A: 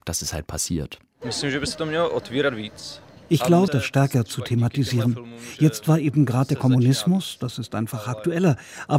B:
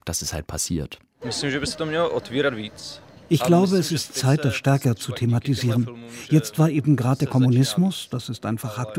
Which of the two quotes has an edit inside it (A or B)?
A